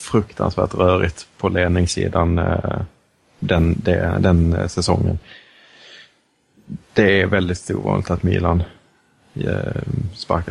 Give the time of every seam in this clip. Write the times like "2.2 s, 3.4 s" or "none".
none